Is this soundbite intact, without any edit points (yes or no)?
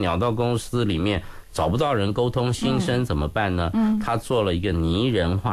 yes